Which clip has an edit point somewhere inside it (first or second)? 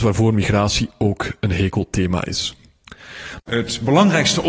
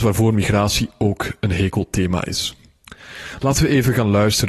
first